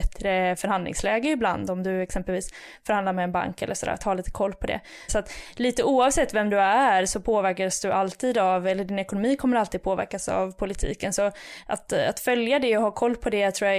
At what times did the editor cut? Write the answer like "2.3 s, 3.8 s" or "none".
5.1 s